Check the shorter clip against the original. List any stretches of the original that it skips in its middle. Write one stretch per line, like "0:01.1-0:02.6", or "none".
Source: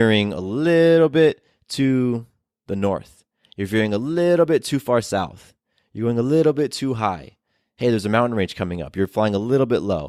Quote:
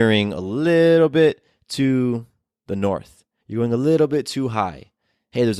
0:03.4-0:05.9